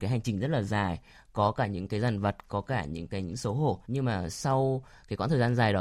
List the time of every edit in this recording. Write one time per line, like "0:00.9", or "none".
0:03.8